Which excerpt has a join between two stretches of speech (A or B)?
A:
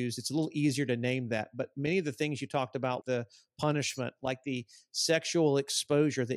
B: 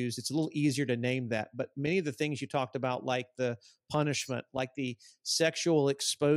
A